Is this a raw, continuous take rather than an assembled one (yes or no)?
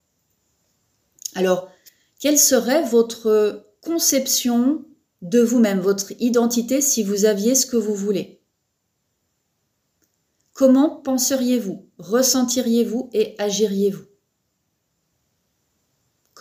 yes